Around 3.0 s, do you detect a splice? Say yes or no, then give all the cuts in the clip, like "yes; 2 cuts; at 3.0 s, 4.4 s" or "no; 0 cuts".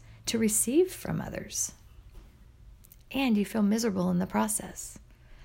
yes; 1 cut; at 3.0 s